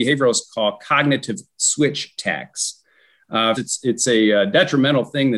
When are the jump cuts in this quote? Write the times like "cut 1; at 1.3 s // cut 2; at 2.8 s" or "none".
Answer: cut 1; at 3.6 s